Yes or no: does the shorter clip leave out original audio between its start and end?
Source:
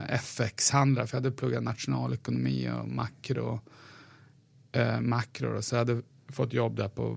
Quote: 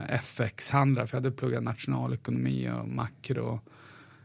no